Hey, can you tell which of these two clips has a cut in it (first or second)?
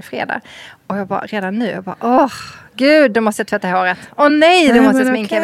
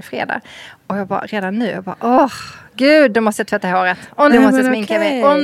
second